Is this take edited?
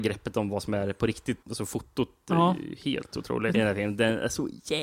yes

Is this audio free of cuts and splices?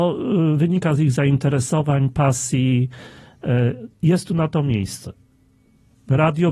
yes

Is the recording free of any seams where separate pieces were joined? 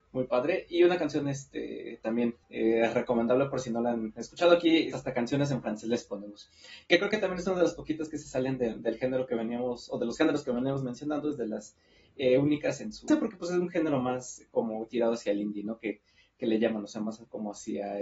no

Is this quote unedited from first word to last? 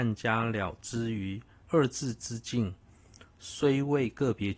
no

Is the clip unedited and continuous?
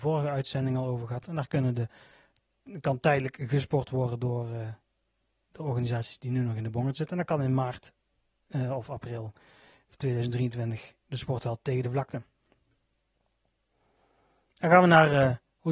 yes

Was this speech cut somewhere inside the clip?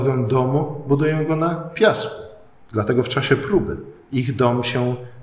no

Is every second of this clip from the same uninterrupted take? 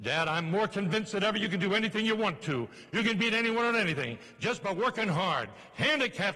yes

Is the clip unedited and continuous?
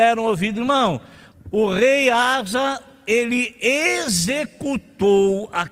no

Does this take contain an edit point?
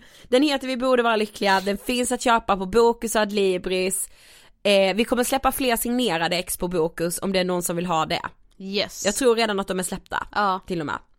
no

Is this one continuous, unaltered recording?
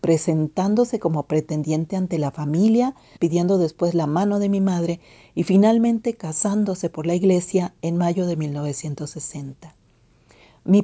no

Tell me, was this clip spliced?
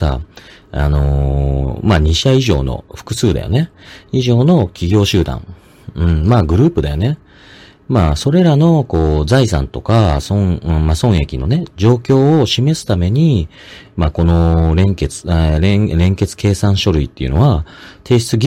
no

